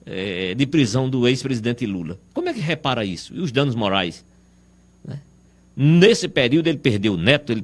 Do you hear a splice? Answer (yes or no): no